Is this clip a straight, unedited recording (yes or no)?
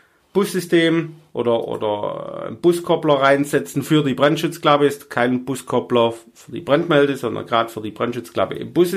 yes